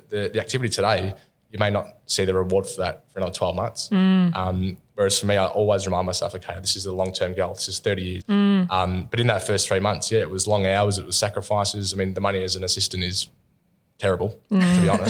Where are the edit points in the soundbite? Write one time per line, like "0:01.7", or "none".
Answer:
0:08.2